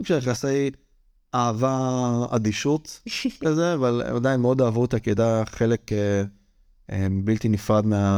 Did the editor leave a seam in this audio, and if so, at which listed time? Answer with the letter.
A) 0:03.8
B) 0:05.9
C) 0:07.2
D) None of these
D